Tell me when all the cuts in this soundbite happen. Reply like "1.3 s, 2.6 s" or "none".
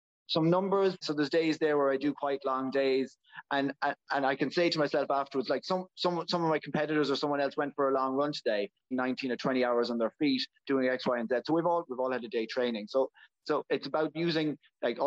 1.0 s, 8.9 s, 11.9 s